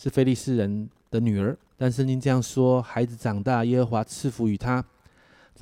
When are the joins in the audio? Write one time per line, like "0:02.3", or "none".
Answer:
0:01.7